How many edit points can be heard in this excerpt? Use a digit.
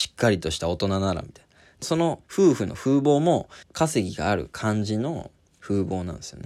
2